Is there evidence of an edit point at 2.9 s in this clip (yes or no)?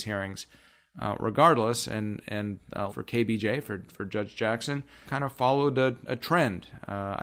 yes